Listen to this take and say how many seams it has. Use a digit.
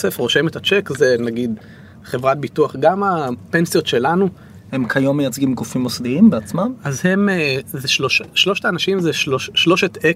1